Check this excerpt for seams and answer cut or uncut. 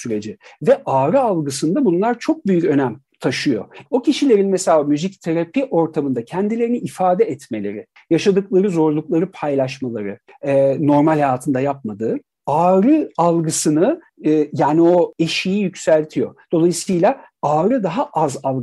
cut